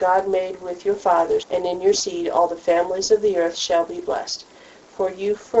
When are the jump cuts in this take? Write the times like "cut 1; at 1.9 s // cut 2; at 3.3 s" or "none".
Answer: cut 1; at 1.4 s